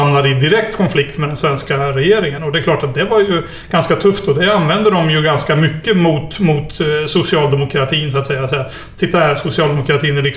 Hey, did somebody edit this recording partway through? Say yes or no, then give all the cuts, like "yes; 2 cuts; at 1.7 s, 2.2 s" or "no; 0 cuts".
no; 0 cuts